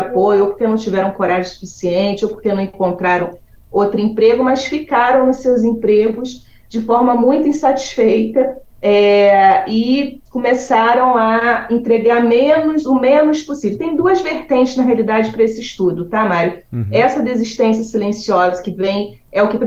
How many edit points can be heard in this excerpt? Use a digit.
0